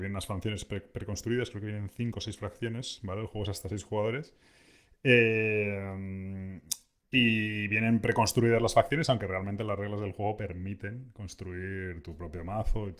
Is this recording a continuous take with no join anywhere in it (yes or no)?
yes